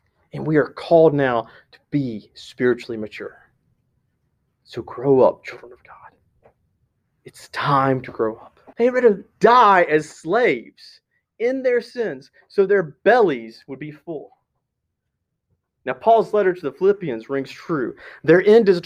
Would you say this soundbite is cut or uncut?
cut